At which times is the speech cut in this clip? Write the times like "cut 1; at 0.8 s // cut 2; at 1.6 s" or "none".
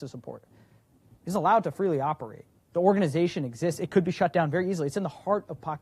cut 1; at 2.7 s